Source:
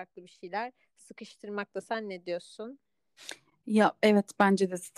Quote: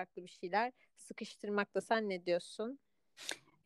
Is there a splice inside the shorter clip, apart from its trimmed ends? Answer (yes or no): no